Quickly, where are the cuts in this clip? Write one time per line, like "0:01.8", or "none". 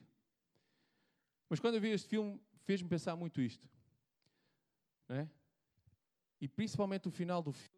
none